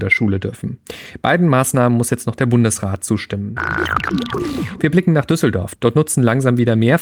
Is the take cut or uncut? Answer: uncut